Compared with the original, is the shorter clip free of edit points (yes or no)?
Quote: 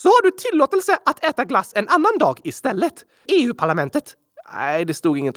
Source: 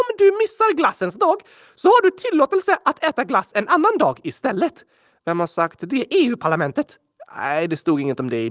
no